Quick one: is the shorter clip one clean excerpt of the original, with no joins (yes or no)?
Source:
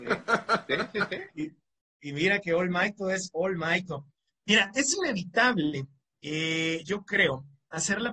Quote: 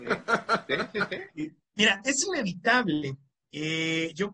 no